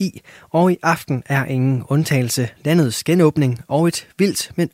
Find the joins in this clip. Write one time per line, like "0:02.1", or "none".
0:02.5